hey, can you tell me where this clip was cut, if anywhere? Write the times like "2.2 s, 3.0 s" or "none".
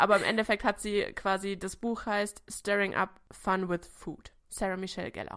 4.4 s